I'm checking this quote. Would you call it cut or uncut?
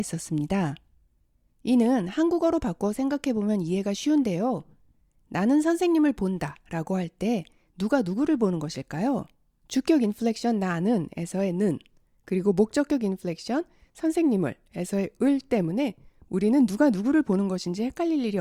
cut